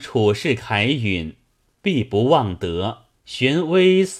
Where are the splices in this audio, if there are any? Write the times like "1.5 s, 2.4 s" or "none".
3.2 s